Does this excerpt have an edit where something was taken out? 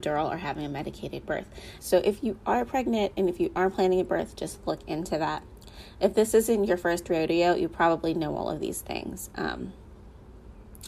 yes; 1 cut; at 1.8 s

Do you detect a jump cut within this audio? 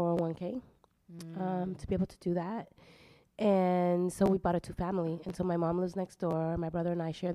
no; 0 cuts

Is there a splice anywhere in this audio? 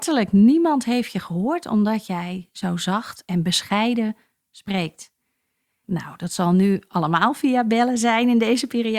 yes; 1 cut; at 5.8 s

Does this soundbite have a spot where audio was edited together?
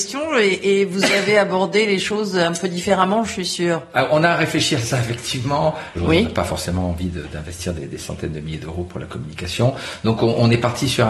yes; 1 cut; at 5.9 s

